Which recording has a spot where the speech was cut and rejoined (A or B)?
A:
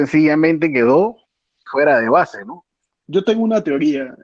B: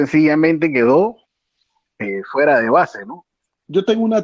A